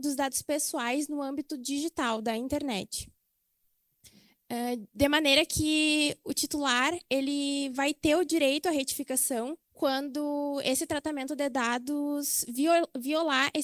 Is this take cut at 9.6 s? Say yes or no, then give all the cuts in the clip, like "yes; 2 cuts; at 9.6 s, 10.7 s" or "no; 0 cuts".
yes; 1 cut; at 9.6 s